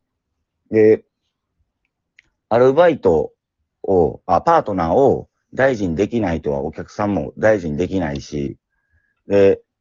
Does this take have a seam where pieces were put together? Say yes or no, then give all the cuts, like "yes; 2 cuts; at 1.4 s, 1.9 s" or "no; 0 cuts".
no; 0 cuts